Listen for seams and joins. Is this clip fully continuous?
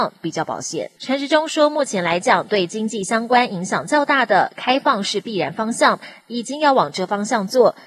no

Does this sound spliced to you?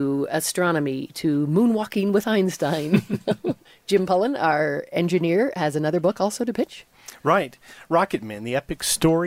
no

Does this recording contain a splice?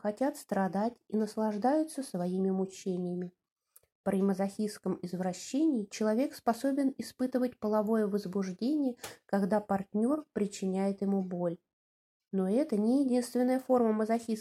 no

